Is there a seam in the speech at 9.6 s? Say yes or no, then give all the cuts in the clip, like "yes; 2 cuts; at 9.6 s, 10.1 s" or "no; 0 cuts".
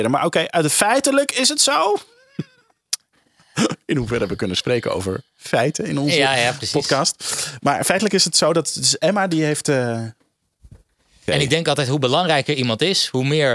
no; 1 cut; at 11.3 s